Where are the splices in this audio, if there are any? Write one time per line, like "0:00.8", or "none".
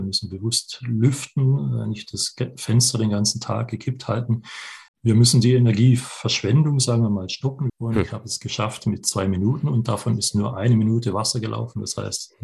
0:04.9
0:07.7